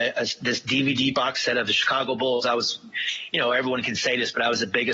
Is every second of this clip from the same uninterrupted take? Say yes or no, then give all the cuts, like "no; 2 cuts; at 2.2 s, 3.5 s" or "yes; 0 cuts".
yes; 0 cuts